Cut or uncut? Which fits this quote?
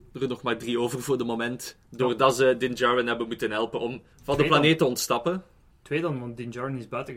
cut